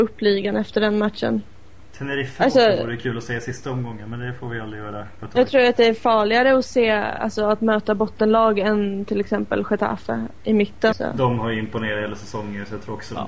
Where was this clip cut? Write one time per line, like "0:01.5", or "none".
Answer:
0:10.9